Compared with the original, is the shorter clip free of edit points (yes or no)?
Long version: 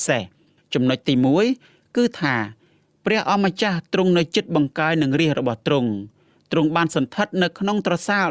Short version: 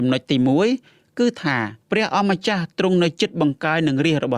no